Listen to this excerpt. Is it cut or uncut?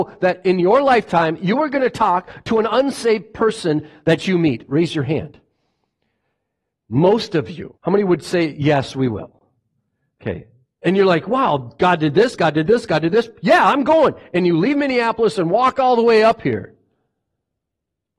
cut